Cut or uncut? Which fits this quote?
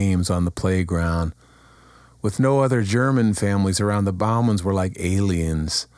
uncut